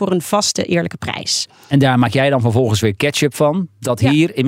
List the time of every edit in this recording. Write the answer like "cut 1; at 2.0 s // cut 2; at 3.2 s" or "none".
none